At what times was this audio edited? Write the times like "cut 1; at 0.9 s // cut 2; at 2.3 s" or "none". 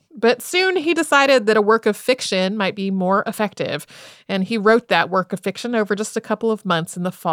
none